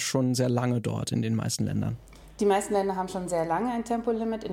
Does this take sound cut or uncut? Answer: uncut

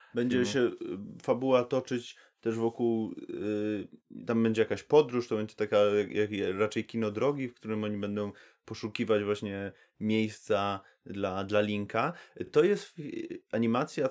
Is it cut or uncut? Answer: uncut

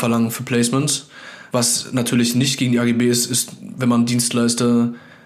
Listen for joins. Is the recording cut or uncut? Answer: cut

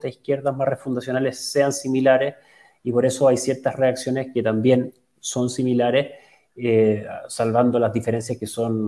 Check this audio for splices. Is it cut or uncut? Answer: uncut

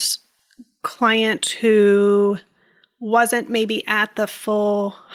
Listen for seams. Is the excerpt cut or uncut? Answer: uncut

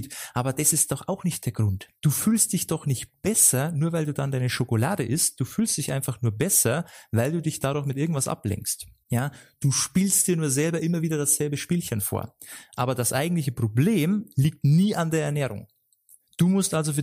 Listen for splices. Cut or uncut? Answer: uncut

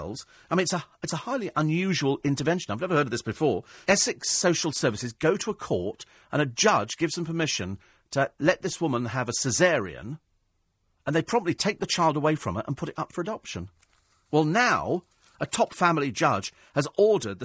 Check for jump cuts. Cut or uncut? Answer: cut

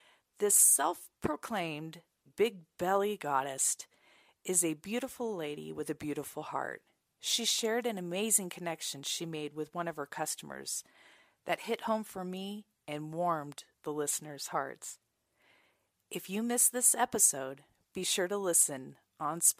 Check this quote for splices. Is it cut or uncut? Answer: cut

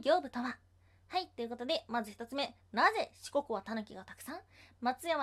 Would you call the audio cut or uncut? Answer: uncut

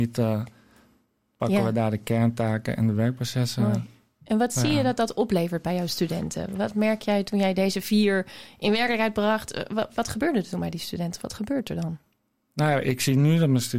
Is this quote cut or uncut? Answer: uncut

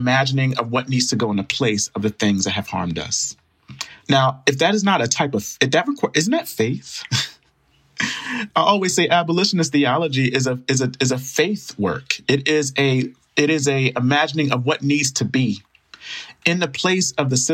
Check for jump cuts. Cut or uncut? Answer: cut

